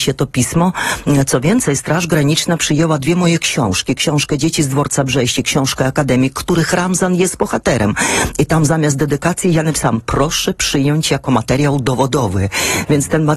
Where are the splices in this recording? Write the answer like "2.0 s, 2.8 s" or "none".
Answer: none